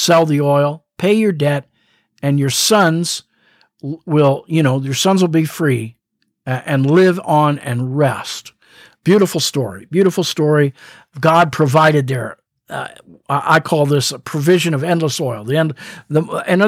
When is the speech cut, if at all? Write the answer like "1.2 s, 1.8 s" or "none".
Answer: none